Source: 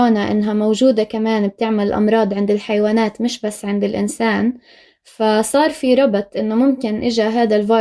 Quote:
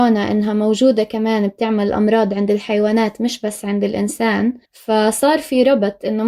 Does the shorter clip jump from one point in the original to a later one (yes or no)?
yes